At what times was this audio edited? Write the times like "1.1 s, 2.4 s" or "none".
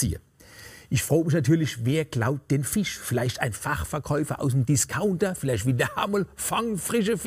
none